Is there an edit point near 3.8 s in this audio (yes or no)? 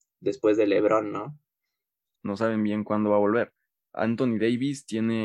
no